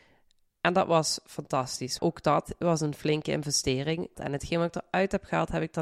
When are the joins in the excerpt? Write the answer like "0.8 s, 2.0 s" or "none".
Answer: 2.0 s, 4.2 s

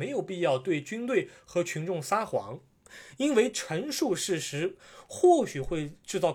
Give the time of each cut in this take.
none

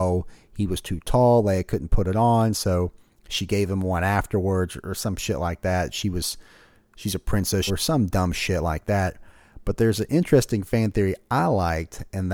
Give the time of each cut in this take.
7.7 s

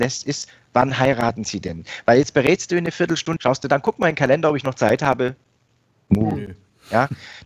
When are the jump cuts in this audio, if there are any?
3.4 s

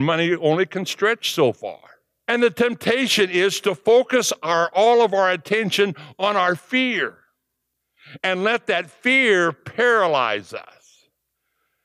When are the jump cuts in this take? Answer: 2.2 s

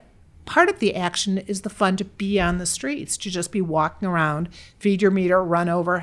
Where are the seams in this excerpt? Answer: none

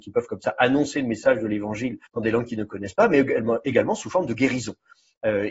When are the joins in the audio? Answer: 2.1 s

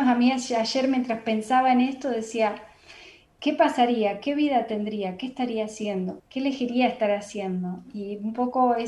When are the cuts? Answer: 6.2 s

